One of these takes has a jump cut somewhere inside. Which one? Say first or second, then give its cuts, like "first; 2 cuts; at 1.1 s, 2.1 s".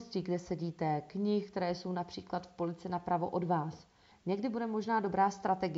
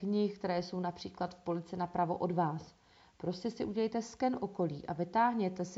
first; 1 cut; at 4.1 s